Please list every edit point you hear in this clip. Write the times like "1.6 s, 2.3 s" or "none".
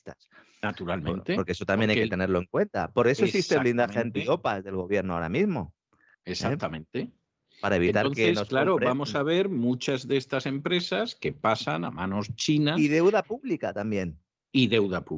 none